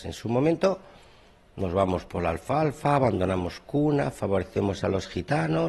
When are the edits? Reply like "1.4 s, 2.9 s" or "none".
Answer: none